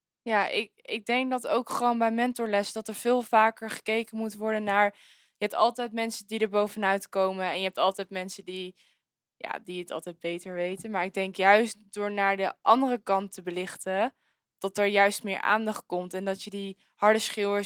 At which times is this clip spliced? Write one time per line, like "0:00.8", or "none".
none